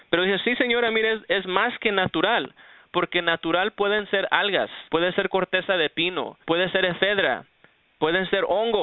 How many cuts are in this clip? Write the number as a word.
two